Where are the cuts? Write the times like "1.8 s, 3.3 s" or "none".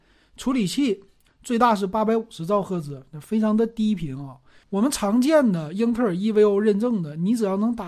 1.3 s, 4.6 s